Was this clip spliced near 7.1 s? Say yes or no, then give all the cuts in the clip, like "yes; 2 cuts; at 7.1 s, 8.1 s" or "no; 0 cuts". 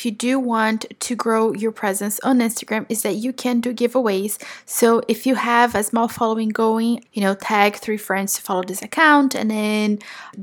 yes; 1 cut; at 7.1 s